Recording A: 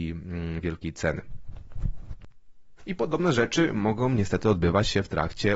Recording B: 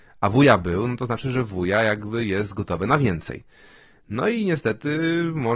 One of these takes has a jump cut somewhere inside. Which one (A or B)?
A